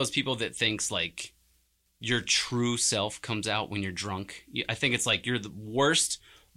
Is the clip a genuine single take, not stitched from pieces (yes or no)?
yes